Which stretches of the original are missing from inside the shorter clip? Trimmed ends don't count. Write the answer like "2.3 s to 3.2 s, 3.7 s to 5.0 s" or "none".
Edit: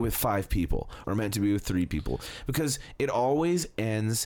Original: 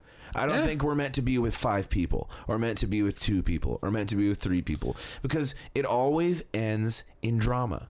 2.4 s to 3.8 s